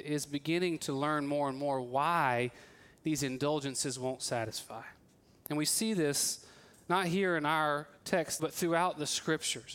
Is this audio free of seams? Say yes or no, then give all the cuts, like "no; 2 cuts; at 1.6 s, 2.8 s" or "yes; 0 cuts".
no; 1 cut; at 8.4 s